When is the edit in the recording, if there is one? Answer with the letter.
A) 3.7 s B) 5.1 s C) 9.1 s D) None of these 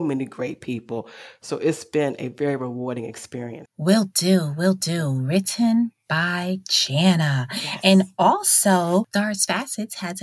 A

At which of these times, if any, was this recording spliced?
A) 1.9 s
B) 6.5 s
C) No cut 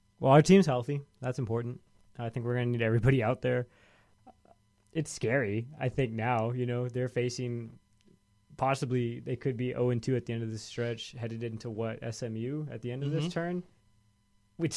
C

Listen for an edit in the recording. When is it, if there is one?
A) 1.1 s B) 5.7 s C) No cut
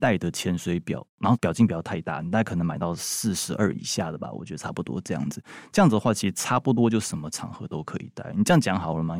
C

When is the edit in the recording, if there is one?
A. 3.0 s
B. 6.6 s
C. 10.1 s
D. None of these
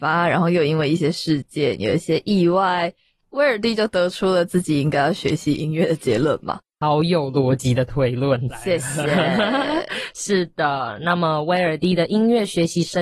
D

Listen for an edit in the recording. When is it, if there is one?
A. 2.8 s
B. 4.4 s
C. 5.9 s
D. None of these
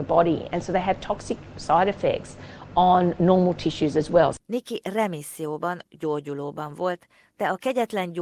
B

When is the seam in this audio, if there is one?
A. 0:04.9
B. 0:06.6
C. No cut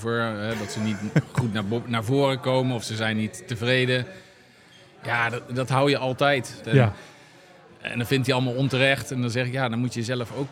B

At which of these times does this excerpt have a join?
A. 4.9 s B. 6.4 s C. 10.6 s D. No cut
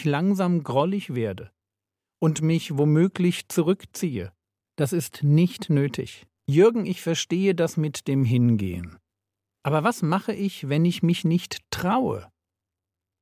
B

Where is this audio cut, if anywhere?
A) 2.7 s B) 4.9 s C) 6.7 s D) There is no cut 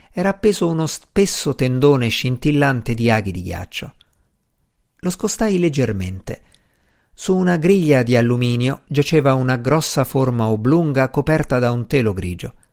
D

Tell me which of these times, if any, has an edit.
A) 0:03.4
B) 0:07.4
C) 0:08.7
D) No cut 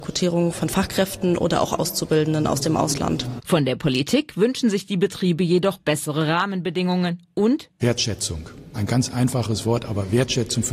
A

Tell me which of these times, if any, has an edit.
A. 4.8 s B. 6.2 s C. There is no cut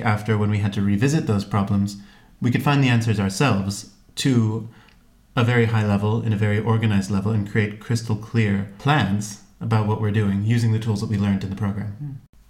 C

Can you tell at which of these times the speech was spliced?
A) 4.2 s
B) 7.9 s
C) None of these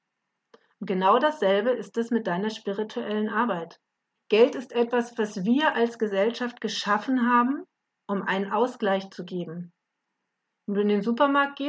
A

